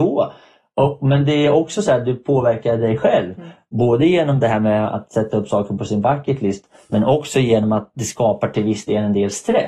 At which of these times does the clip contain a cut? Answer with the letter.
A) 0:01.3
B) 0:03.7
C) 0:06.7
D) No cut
D